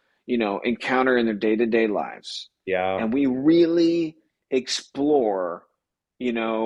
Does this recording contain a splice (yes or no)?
no